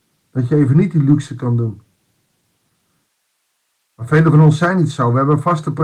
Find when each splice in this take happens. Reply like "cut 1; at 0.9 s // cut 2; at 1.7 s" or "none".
none